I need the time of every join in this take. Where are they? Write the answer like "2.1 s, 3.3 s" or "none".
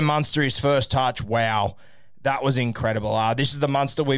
none

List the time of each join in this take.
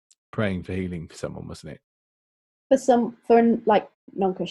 none

